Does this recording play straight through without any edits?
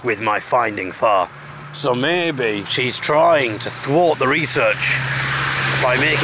no; 1 cut; at 0.9 s

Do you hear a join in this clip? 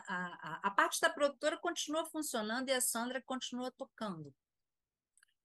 no; 0 cuts

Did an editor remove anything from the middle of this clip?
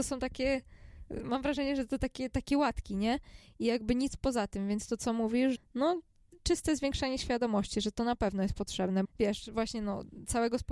yes; 2 cuts; at 5.6 s, 9.0 s

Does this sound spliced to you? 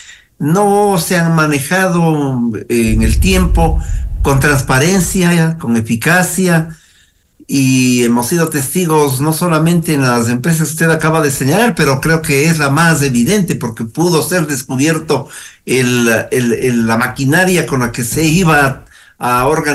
no; 0 cuts

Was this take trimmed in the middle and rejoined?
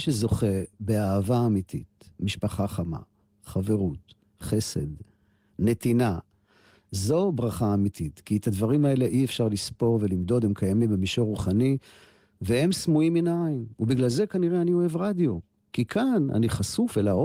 no; 0 cuts

